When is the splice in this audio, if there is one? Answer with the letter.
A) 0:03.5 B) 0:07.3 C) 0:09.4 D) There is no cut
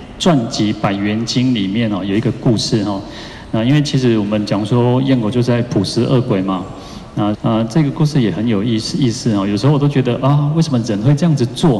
B